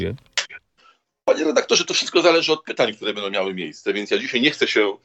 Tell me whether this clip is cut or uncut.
uncut